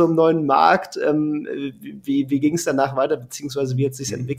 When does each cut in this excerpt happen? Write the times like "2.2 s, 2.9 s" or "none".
none